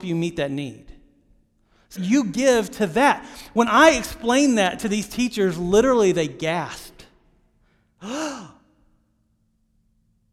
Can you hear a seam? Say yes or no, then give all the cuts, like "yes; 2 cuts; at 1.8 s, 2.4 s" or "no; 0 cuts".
yes; 1 cut; at 1.9 s